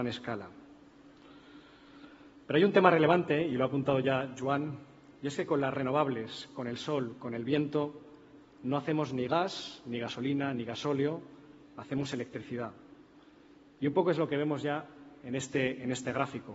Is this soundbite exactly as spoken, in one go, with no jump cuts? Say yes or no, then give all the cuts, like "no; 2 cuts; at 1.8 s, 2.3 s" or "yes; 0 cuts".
yes; 0 cuts